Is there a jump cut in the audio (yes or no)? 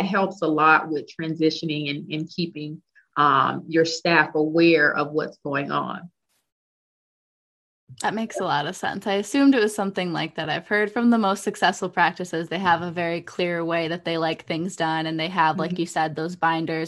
no